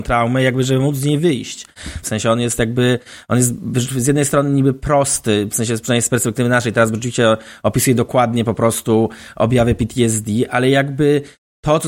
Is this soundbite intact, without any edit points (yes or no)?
no